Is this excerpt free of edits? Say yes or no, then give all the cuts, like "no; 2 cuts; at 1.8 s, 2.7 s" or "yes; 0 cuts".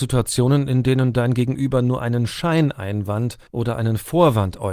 no; 1 cut; at 3.5 s